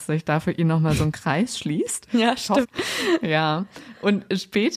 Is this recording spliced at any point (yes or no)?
yes